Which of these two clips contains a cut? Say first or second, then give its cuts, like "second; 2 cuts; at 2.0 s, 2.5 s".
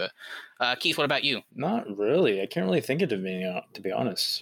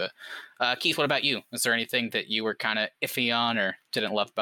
first; 1 cut; at 1.5 s